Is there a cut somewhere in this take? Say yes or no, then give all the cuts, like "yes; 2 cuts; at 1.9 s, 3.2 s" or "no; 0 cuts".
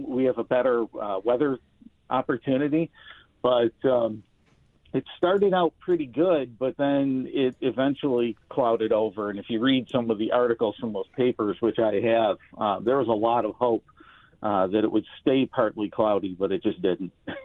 no; 0 cuts